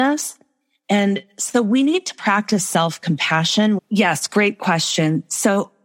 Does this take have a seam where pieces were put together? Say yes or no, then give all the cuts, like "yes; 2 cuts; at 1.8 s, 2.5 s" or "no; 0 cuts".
yes; 1 cut; at 3.8 s